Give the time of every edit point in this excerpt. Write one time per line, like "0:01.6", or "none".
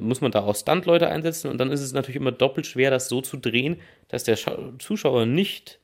none

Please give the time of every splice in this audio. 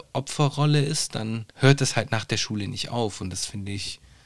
0:01.5

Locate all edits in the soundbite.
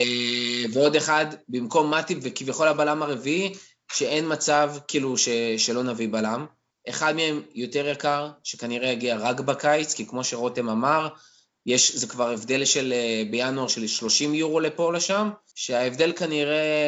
0:06.7
0:15.5

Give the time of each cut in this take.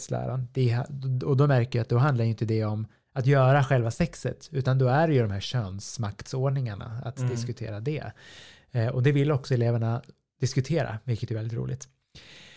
none

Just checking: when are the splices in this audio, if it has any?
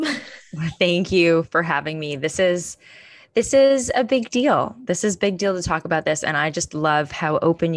none

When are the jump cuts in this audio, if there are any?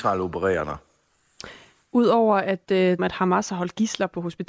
0:03.0

